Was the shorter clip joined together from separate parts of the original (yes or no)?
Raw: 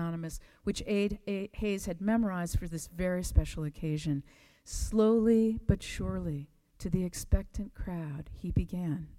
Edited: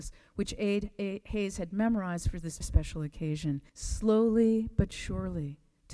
yes